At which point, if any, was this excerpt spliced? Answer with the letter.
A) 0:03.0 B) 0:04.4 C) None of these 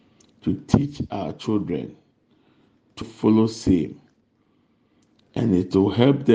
A